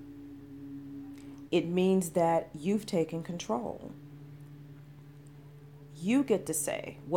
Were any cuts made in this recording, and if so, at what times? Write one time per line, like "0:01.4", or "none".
0:01.5